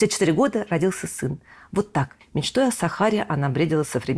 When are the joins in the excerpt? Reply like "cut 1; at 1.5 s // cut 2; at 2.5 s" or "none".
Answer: cut 1; at 2.2 s